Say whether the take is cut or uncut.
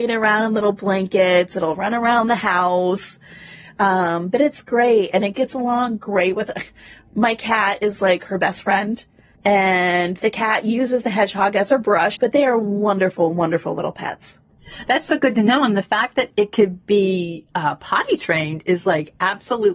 cut